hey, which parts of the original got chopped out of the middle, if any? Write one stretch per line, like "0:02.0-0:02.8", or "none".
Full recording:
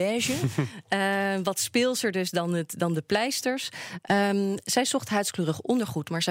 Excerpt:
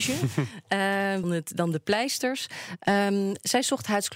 0:01.4-0:02.5